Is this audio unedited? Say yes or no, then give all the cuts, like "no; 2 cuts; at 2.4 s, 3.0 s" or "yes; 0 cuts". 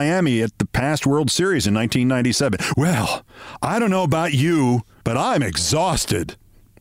no; 2 cuts; at 2.7 s, 5.0 s